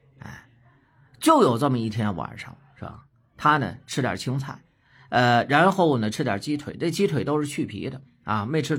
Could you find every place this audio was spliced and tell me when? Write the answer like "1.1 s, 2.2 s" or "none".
none